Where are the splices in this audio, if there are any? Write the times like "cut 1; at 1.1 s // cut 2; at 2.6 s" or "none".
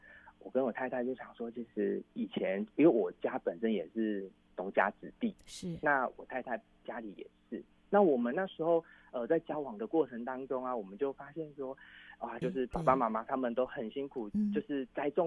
cut 1; at 12.4 s